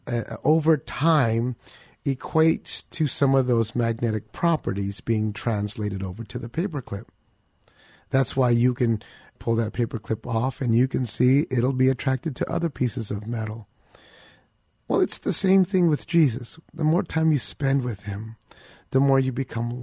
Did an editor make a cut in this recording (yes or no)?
yes